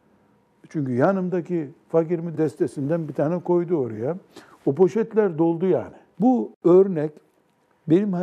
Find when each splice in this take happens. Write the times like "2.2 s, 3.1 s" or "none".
2.3 s, 6.1 s